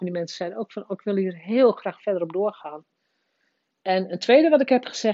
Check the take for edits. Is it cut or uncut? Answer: cut